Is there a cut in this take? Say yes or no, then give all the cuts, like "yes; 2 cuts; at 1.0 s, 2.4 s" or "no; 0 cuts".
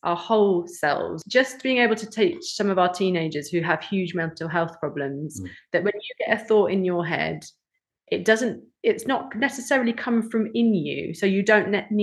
no; 0 cuts